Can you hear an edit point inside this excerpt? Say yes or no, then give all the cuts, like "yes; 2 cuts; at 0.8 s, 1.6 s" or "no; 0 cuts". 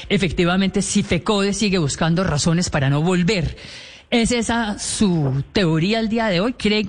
no; 0 cuts